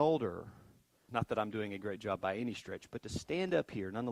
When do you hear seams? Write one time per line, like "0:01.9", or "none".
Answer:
0:01.1